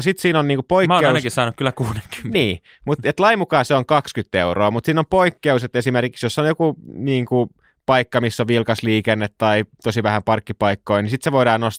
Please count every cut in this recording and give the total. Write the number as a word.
zero